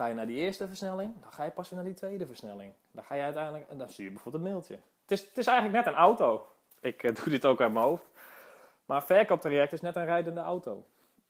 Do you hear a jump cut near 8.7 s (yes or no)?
no